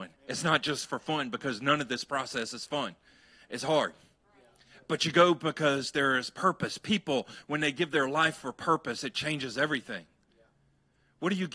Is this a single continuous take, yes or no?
yes